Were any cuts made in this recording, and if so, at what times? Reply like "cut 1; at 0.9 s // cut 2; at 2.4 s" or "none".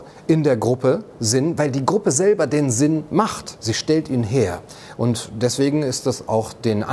none